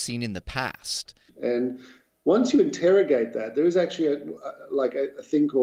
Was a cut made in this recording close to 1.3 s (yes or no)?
yes